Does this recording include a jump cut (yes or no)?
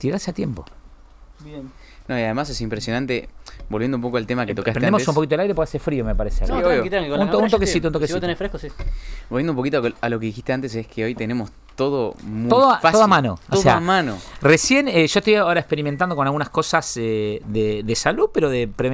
no